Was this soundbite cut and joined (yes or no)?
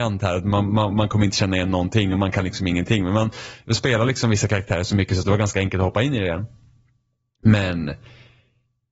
no